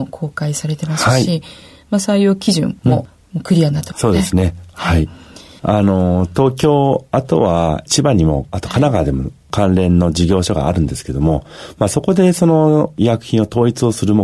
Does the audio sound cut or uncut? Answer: uncut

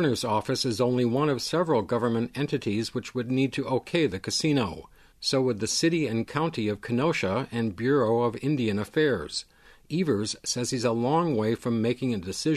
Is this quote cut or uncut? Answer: uncut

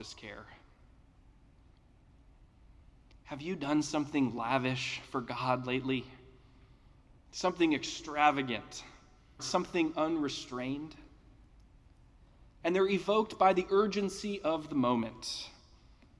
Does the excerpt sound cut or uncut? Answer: cut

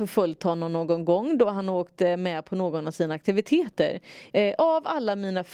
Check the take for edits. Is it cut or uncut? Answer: cut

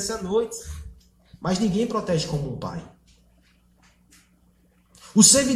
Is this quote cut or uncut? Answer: uncut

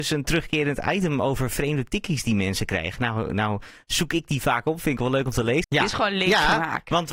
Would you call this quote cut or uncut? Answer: cut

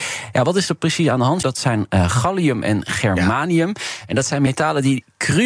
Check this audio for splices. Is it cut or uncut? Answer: cut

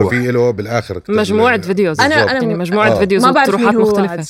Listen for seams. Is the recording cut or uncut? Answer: uncut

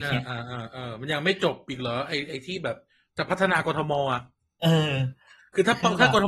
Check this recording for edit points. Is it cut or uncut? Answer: uncut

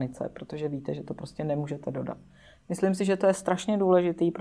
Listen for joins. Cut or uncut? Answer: uncut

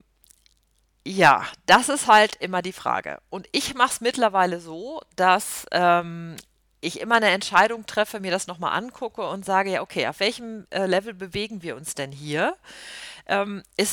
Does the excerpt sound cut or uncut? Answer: uncut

